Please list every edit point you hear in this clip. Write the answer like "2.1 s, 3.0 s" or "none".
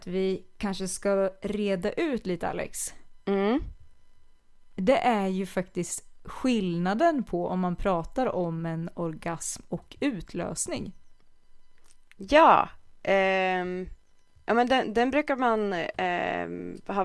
none